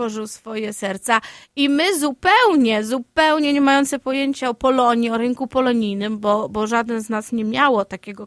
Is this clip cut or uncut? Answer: uncut